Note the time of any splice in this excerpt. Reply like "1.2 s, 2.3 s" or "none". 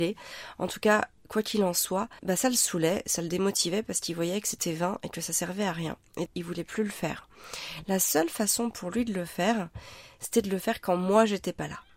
2.2 s, 6.3 s